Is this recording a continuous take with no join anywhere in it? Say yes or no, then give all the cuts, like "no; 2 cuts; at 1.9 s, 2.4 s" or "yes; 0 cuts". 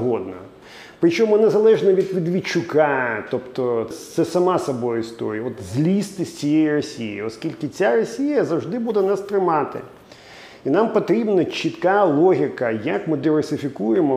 no; 1 cut; at 3.9 s